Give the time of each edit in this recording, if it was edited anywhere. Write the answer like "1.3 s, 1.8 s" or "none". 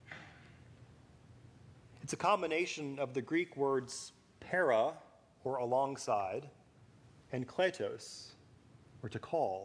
none